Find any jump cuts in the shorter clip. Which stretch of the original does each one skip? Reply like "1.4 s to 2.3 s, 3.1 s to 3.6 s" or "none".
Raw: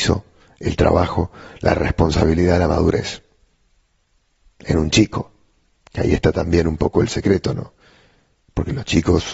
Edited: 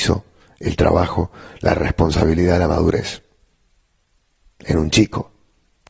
none